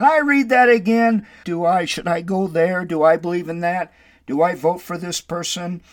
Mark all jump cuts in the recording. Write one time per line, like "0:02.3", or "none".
0:01.4